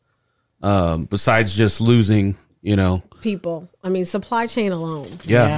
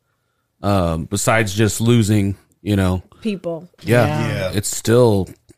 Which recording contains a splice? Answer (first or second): second